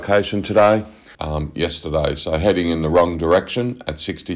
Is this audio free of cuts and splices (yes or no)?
no